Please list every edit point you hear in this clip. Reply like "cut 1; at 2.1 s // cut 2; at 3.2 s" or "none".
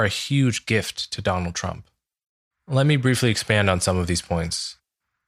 cut 1; at 2.5 s